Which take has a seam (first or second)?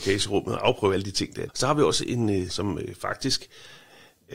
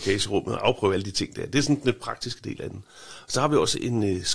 first